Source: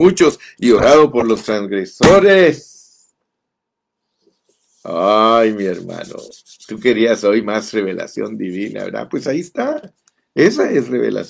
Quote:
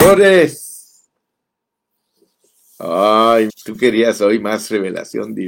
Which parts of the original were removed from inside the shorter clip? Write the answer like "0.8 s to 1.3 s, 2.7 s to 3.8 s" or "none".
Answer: 5.5 s to 6.5 s